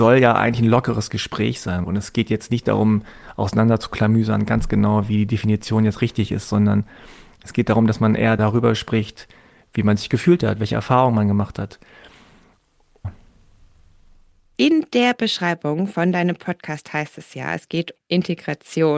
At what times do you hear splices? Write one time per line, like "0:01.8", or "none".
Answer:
0:01.8
0:13.0
0:18.0